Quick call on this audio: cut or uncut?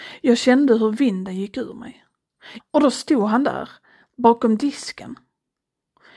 cut